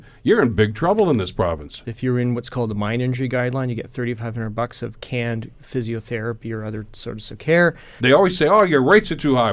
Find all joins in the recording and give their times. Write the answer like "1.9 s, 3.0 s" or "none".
1.8 s, 8.0 s